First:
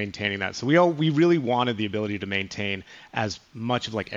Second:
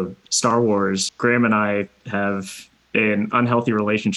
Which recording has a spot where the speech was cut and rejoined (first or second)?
second